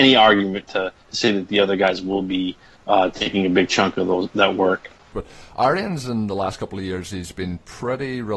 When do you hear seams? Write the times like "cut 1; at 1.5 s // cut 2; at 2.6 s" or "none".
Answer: cut 1; at 5.1 s

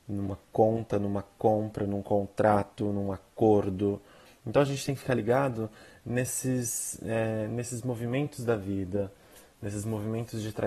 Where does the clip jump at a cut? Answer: cut 1; at 4.3 s

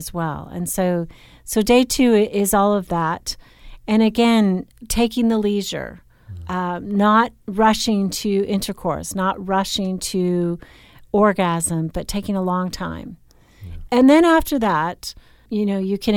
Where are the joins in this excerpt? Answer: none

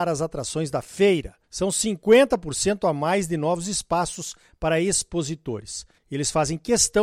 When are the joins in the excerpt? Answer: cut 1; at 1.4 s // cut 2; at 6.0 s

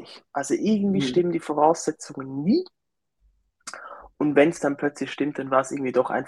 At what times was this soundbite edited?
none

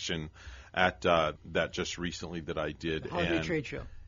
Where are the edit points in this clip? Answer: cut 1; at 1.4 s

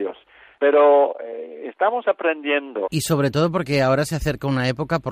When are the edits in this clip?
cut 1; at 2.8 s

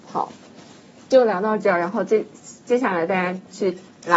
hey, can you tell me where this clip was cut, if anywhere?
none

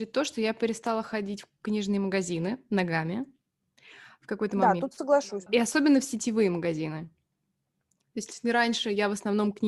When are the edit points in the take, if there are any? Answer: cut 1; at 5.5 s

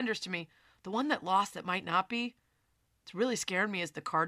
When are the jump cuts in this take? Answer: none

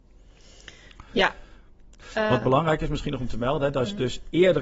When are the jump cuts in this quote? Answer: none

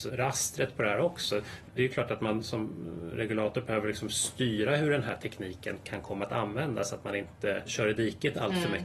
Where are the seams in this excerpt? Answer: cut 1; at 1.7 s

